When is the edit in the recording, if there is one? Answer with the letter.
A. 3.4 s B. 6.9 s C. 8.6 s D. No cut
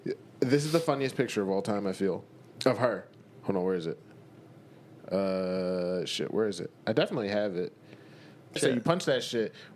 C